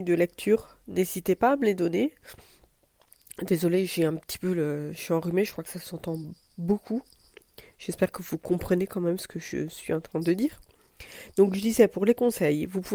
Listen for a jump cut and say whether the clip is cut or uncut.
uncut